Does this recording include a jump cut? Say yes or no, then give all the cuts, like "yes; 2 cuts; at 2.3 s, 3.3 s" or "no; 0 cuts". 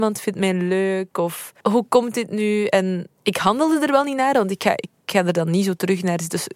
no; 0 cuts